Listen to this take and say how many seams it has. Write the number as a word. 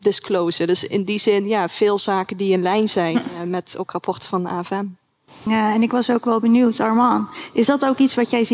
one